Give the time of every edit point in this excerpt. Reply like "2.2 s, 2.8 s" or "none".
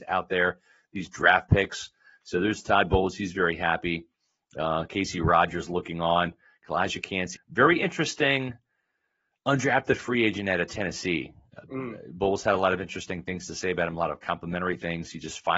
7.4 s